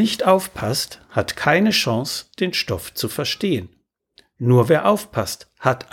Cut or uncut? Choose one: uncut